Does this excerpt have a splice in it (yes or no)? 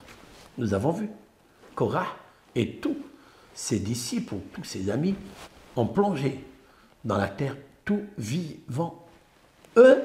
no